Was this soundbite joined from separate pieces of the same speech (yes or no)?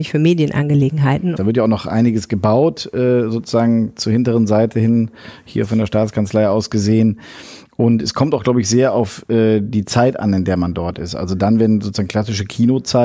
yes